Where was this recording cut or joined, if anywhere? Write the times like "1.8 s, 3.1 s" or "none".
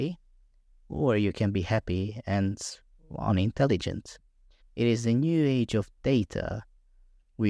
4.6 s